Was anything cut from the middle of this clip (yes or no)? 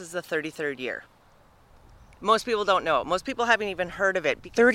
no